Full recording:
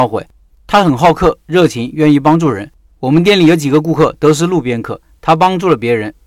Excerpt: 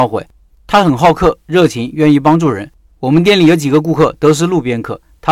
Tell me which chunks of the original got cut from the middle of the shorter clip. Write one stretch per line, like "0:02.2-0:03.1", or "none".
none